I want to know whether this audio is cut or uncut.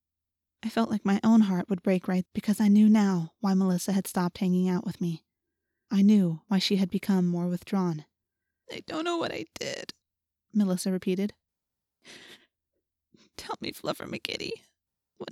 cut